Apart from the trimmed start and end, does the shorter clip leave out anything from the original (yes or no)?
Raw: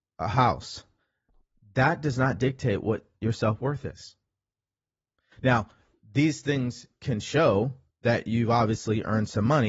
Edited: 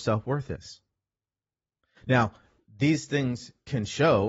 no